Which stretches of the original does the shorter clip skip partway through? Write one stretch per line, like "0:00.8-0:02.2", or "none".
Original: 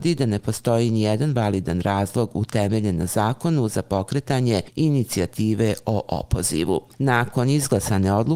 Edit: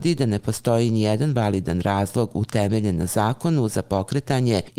none